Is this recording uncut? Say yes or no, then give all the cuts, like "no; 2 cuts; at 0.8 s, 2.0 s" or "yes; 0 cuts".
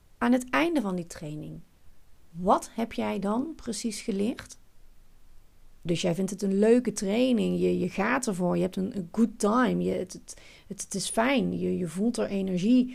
no; 1 cut; at 5.9 s